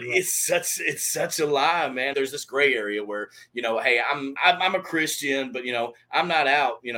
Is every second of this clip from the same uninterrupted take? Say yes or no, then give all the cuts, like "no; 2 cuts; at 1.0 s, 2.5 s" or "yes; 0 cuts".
no; 2 cuts; at 2.1 s, 4.4 s